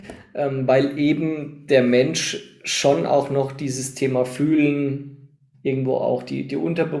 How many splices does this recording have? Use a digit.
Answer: 1